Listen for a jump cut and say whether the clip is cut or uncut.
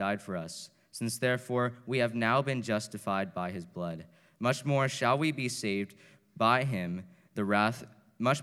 uncut